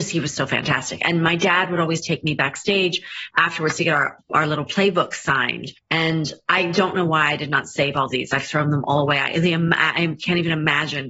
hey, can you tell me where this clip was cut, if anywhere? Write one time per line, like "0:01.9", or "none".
0:04.2